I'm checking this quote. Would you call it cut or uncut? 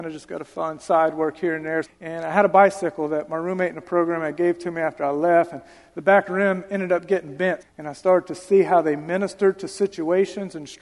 cut